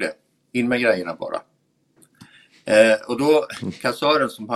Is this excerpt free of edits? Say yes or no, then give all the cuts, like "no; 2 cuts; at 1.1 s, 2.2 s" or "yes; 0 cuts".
yes; 0 cuts